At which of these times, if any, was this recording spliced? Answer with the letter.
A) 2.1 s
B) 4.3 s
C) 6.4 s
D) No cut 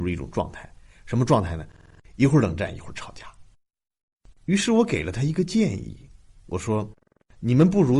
B